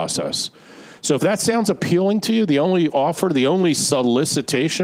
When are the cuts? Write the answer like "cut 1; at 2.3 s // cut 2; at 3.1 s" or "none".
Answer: none